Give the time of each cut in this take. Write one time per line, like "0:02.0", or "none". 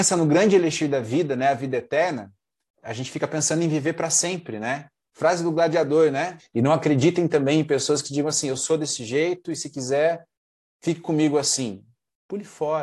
0:05.1
0:06.4